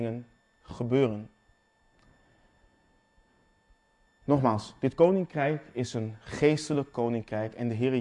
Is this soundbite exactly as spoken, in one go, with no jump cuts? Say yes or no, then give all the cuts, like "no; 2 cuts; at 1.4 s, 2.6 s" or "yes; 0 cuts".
yes; 0 cuts